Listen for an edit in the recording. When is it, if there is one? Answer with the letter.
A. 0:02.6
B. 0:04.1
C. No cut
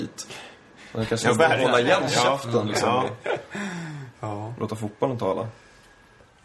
B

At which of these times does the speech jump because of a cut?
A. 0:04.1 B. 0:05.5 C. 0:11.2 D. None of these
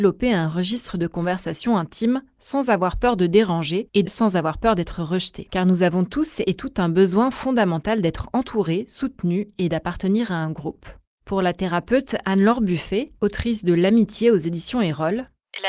A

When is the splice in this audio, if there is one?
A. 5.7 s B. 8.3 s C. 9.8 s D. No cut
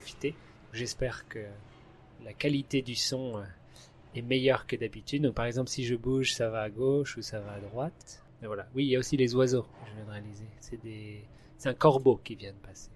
B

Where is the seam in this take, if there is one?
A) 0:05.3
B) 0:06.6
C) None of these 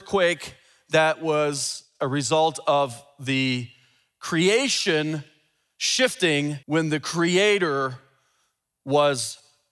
B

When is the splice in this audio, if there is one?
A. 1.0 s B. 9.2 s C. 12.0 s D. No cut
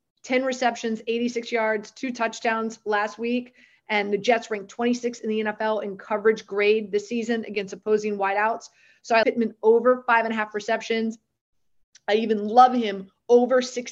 B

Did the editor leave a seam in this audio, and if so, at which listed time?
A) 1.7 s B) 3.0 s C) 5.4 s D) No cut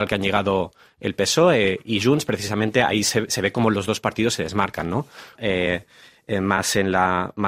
C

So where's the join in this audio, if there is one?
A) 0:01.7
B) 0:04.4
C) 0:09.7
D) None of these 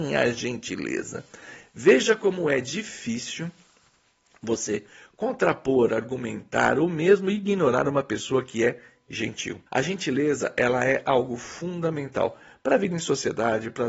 C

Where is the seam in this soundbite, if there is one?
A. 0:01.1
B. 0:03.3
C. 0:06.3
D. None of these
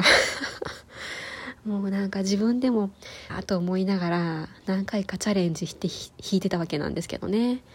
B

